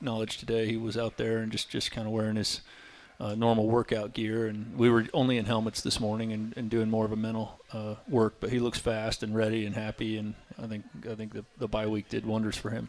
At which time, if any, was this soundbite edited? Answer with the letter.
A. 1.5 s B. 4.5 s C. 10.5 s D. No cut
C